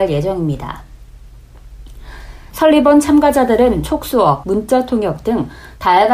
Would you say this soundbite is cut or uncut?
cut